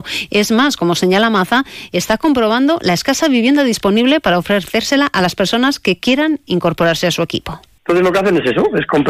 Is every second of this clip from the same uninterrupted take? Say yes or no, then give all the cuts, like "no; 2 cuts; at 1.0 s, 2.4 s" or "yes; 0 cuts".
no; 1 cut; at 7.8 s